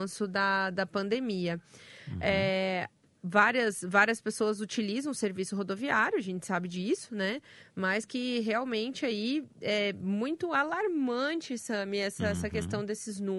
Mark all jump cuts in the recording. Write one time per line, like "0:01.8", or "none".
none